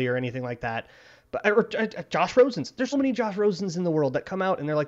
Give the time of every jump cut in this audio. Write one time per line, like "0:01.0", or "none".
0:02.9